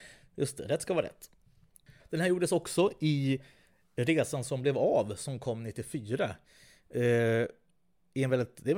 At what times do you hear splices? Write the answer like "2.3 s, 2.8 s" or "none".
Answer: none